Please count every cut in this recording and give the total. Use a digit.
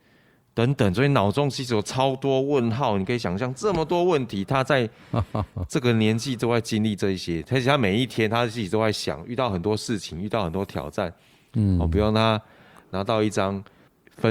0